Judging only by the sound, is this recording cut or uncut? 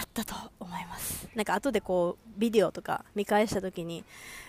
uncut